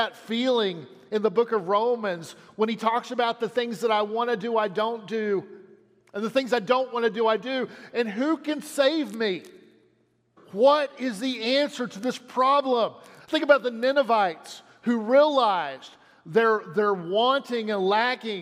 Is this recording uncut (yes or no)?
no